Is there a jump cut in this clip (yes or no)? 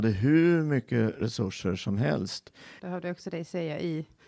yes